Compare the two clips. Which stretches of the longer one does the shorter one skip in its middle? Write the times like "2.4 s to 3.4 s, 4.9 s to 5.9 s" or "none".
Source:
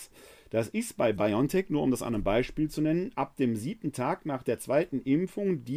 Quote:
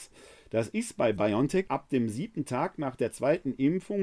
1.7 s to 3.1 s

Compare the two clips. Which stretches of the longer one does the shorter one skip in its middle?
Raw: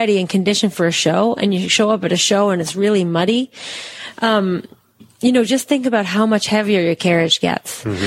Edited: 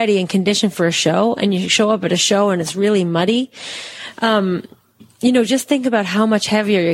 none

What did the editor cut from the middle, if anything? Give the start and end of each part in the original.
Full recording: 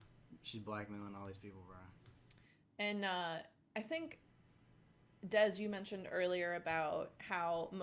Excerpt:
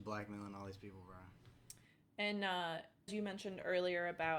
3.7 s to 5.5 s

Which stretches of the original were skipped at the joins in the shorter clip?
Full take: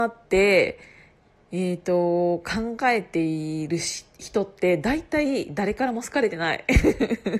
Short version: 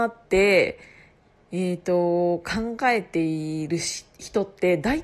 none

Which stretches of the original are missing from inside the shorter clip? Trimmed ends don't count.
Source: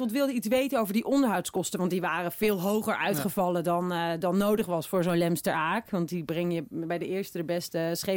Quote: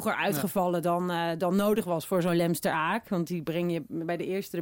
none

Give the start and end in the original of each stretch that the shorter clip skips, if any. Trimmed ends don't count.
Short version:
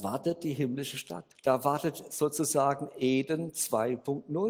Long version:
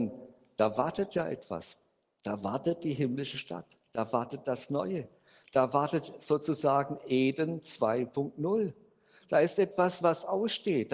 3.7 s to 5.4 s

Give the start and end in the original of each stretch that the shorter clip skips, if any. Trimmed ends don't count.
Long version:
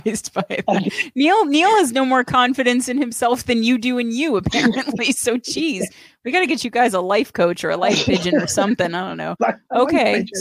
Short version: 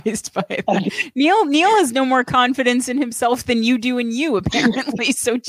none

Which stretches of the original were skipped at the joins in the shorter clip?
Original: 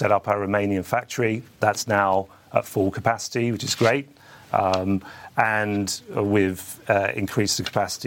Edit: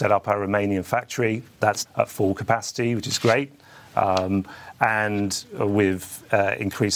1.8 s to 2.4 s

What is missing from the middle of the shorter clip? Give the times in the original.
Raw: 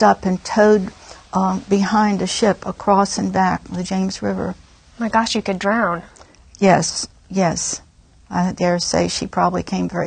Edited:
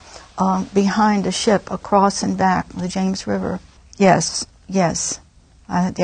4.7 s to 6.4 s

